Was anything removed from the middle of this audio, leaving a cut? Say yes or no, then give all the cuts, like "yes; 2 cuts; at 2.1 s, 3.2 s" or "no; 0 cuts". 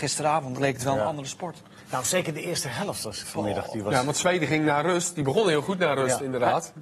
yes; 1 cut; at 3.2 s